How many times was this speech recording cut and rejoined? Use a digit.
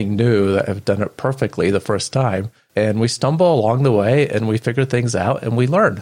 0